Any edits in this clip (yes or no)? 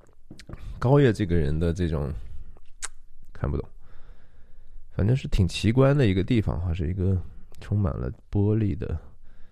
yes